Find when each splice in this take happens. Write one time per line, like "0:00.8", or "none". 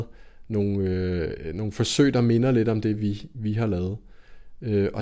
none